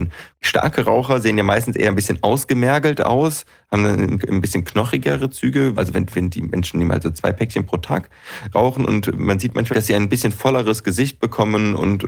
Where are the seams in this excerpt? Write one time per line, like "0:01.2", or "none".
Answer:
0:05.8
0:09.7